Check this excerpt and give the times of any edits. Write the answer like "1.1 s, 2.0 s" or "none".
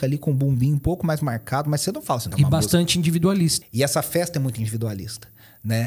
2.3 s, 3.6 s